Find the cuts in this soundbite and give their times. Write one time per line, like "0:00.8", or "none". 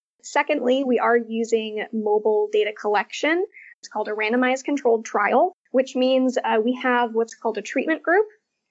0:03.7